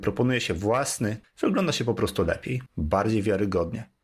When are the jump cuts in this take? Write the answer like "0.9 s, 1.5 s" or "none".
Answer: 1.2 s, 2.7 s